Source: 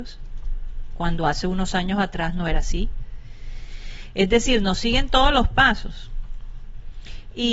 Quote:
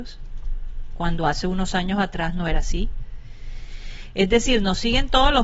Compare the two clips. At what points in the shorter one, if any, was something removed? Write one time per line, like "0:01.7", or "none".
none